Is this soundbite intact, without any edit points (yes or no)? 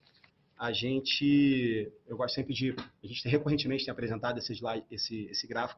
yes